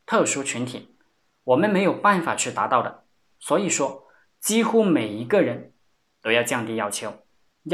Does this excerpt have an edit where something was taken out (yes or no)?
no